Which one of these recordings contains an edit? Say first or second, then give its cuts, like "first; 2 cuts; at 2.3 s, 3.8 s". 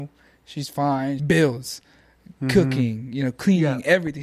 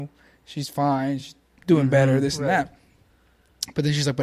first; 1 cut; at 1.2 s